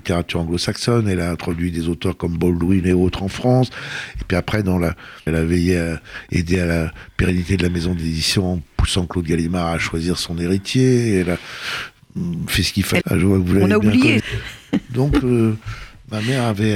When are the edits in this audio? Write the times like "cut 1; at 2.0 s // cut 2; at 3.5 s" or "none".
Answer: cut 1; at 5.3 s // cut 2; at 13.0 s // cut 3; at 14.2 s